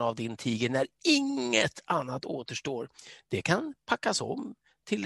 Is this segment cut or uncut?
uncut